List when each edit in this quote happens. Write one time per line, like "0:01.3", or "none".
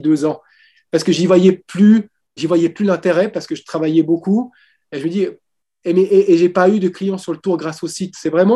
0:02.4